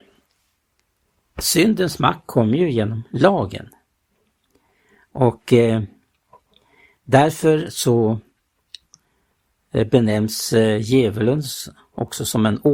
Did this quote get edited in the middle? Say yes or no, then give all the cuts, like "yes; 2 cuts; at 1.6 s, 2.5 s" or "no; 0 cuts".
no; 0 cuts